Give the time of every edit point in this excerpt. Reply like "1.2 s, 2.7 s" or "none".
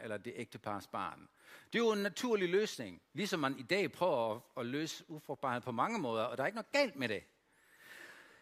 none